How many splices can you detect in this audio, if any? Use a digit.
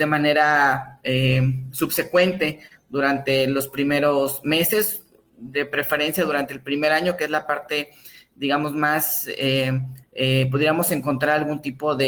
1